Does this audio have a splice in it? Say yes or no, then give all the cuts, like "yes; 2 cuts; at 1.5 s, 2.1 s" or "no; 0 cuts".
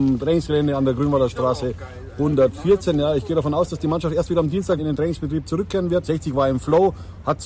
yes; 2 cuts; at 4.8 s, 6.0 s